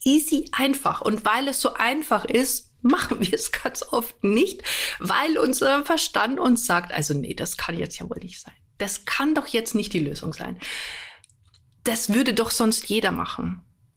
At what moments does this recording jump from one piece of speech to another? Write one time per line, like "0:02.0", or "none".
0:11.7